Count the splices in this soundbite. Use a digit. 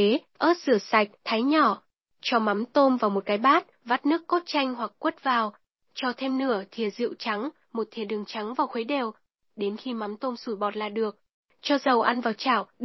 0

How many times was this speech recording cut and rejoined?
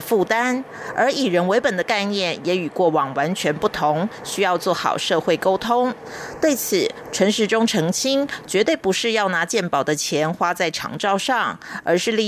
0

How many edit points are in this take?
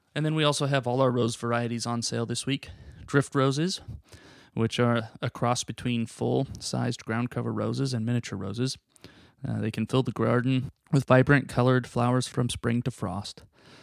0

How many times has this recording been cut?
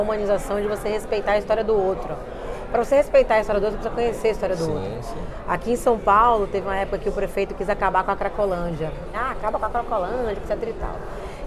2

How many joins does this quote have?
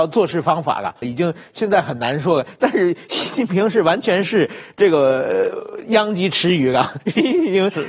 1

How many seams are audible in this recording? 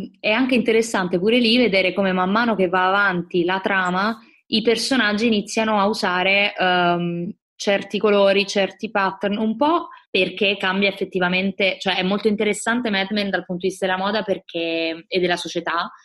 2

